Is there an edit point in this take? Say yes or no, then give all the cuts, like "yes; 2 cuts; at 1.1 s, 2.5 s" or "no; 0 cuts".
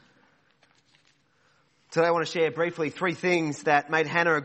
no; 0 cuts